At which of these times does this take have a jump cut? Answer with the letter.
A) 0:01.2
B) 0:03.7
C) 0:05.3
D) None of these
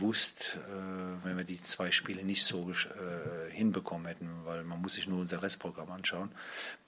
A